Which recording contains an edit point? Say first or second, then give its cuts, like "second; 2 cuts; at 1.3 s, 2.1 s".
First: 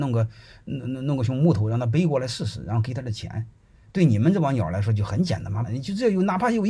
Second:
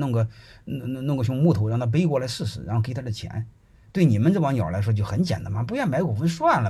first; 1 cut; at 5.6 s